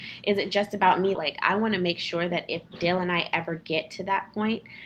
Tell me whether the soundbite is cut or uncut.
cut